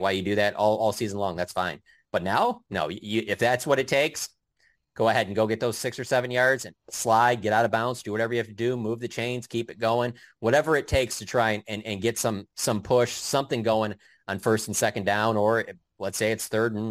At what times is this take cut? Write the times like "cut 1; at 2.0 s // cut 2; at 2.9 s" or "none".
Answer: none